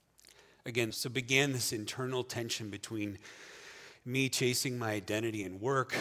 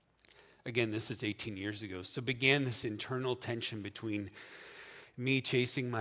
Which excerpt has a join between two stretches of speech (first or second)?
first